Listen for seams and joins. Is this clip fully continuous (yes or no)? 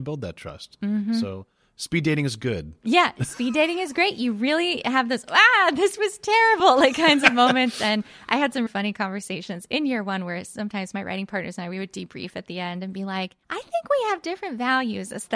no